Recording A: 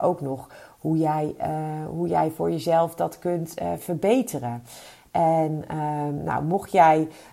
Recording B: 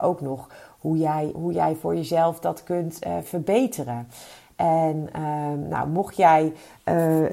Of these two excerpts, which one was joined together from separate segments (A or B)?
B